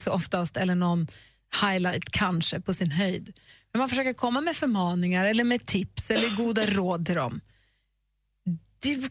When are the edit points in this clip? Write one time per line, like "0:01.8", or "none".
none